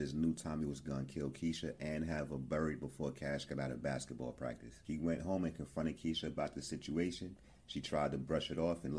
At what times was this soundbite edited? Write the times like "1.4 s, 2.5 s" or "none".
none